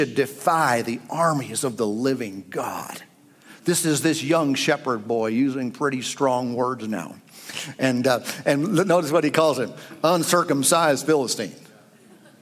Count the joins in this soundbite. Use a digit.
0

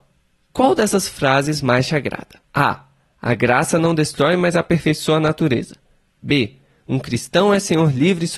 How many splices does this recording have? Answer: 1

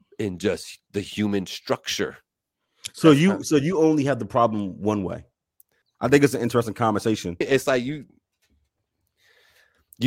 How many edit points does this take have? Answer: 2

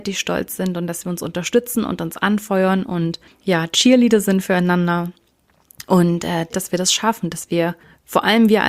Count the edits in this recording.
1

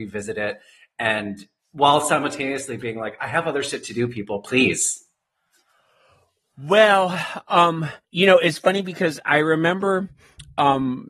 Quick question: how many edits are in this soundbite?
1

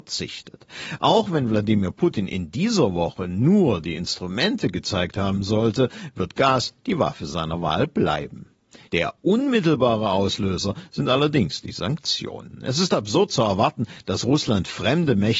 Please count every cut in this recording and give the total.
1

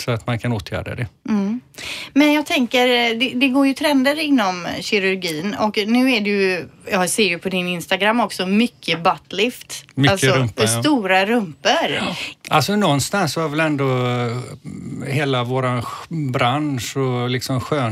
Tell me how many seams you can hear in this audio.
1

